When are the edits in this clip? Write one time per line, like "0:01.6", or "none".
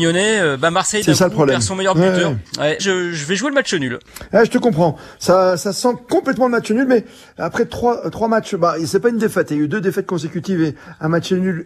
0:02.8